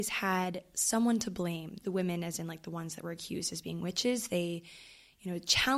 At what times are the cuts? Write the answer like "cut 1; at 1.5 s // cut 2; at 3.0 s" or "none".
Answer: cut 1; at 1.8 s